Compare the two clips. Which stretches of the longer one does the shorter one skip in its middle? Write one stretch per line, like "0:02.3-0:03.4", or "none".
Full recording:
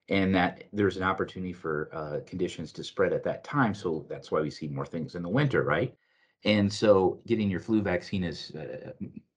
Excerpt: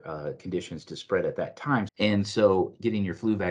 0:03.8-0:06.3